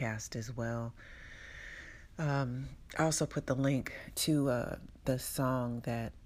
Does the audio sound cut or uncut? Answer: uncut